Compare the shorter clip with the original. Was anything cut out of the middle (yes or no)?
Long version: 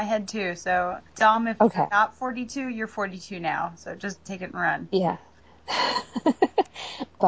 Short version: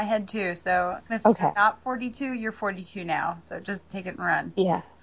yes